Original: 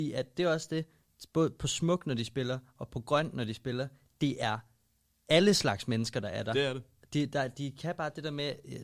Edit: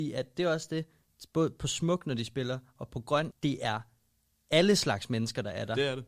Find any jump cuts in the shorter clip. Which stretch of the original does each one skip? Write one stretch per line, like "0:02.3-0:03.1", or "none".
0:03.3-0:04.1

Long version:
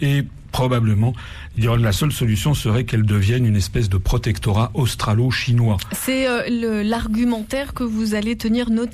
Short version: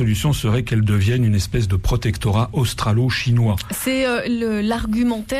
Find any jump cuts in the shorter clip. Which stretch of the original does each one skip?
none

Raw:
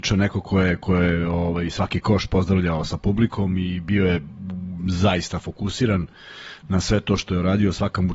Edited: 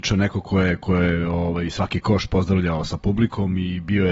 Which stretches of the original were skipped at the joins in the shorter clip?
none

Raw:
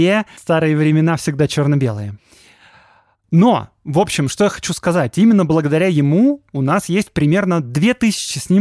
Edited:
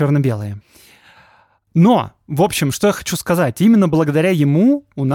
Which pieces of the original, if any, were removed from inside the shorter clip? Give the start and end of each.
none

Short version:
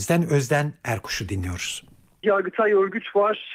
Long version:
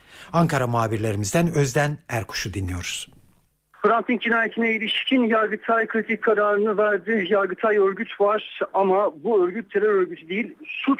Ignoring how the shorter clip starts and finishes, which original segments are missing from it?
0:03.5-0:07.3

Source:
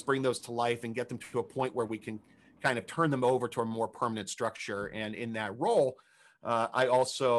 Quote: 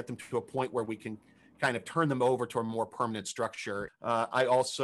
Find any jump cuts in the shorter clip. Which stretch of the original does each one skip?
0:04.9-0:06.3

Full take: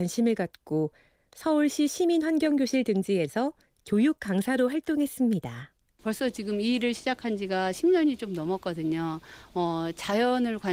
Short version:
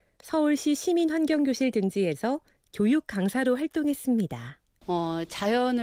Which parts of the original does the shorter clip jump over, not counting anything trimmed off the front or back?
0:05.9-0:09.5

